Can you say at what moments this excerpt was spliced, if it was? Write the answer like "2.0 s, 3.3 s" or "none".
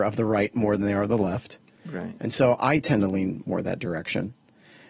none